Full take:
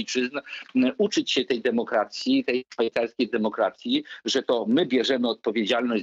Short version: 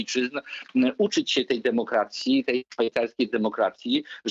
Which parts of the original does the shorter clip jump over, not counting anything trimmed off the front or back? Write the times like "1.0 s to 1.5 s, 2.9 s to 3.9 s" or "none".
none

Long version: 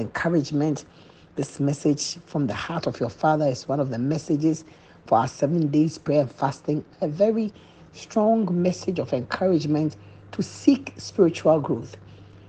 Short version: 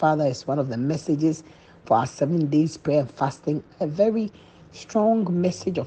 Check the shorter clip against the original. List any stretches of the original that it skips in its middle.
none

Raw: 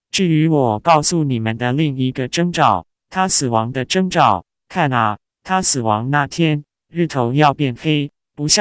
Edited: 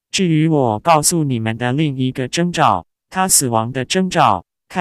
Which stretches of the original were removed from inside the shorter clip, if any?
none

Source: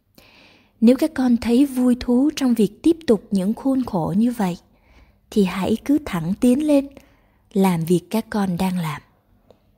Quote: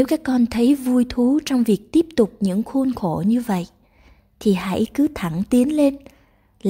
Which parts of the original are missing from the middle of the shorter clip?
none

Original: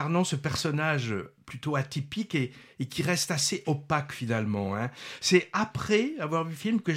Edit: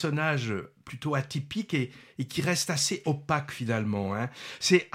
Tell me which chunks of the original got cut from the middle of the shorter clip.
none

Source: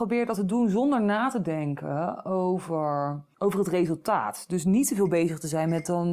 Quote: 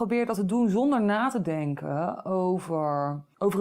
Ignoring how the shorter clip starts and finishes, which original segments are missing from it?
none

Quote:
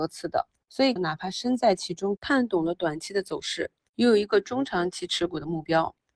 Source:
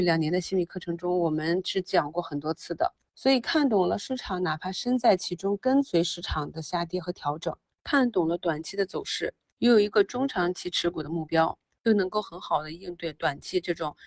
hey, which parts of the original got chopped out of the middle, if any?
3.4 s to 4.4 s, 5.6 s to 7.8 s

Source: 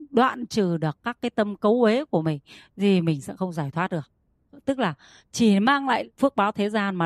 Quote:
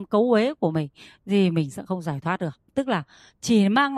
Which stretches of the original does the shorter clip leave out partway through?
4.2 s to 4.6 s

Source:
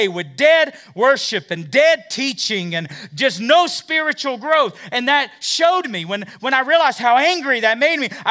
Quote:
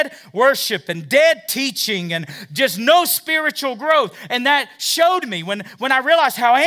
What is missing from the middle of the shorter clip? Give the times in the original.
none

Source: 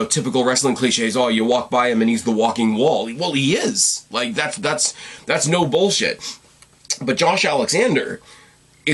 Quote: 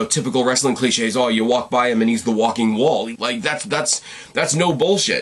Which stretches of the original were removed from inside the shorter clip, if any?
3.1 s to 4.1 s

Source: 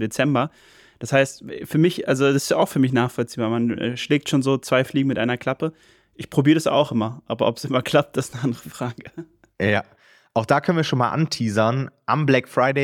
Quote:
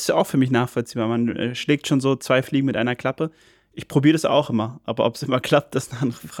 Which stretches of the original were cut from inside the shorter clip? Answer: none

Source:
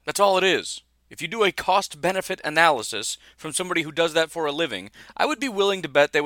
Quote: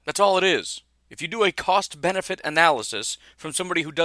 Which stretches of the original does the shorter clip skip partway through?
none

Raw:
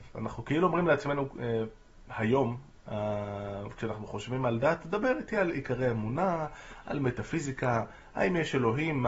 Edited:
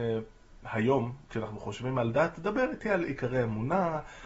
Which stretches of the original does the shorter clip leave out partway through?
2.7 s to 3.8 s

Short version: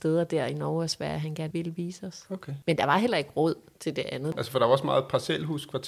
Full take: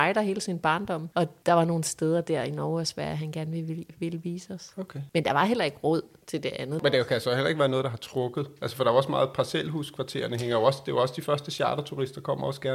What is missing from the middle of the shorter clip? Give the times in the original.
3.4 s to 3.9 s, 6.8 s to 8.6 s

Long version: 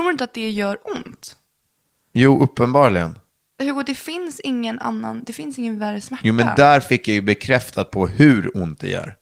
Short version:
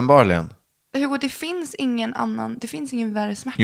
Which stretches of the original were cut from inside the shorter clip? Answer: none

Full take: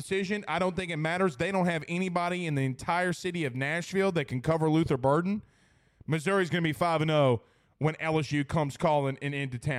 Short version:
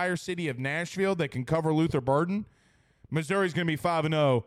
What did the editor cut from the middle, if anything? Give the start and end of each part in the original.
none

